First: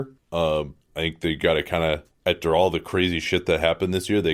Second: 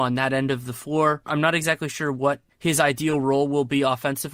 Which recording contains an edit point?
second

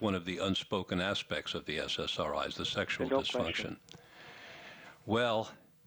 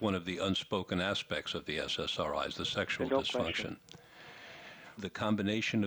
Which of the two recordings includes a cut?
second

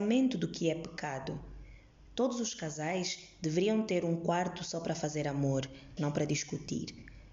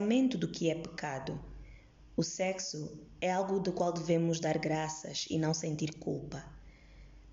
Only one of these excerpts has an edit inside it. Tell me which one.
first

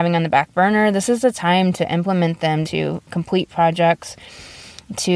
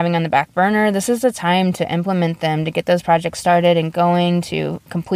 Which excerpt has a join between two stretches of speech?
first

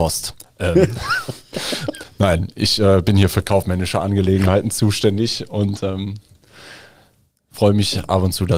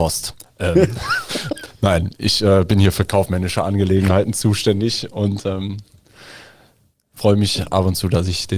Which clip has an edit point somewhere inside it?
second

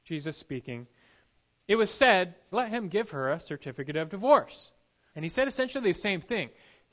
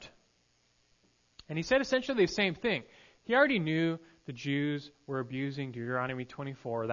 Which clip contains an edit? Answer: first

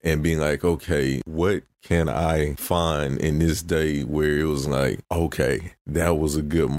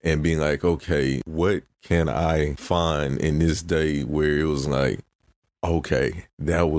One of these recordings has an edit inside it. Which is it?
first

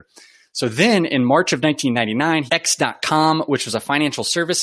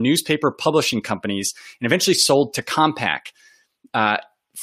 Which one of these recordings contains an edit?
first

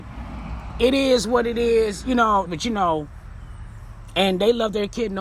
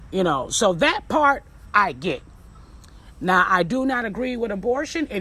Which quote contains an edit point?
first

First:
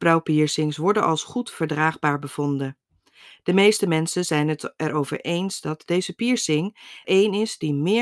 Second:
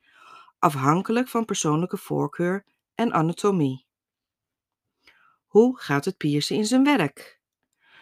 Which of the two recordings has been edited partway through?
first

